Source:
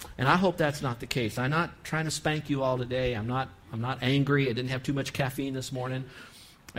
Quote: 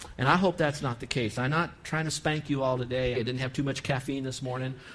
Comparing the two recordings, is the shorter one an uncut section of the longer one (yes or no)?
no